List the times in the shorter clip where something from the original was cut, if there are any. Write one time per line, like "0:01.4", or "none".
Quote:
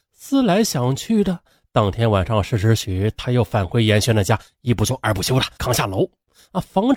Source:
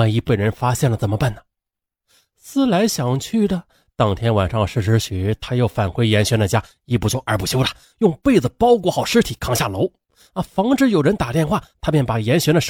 0:05.6